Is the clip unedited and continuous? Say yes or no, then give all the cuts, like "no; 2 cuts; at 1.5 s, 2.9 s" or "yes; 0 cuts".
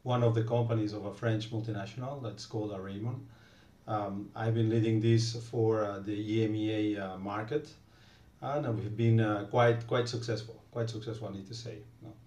yes; 0 cuts